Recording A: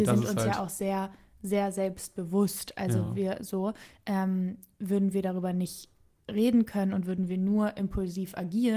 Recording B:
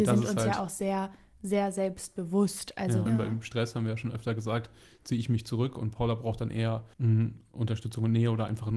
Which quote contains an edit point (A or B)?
B